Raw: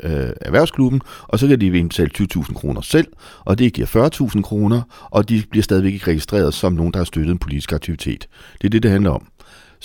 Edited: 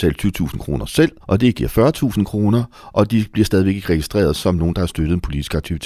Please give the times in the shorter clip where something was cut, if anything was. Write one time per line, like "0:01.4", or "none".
0:01.2